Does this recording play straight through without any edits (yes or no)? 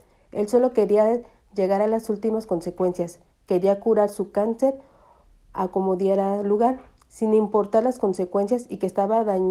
yes